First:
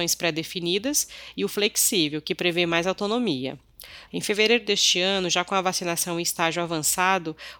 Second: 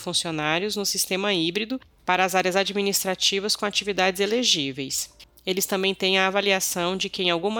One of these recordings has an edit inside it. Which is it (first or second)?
first